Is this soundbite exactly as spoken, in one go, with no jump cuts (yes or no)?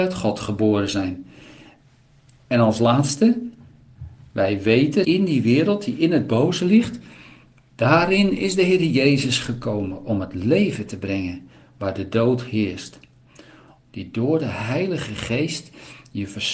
no